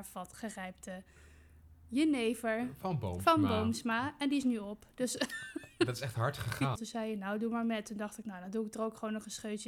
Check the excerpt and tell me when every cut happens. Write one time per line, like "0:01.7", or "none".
0:06.8